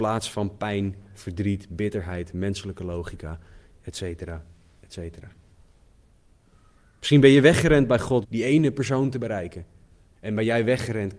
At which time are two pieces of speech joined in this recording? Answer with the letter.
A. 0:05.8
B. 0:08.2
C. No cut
B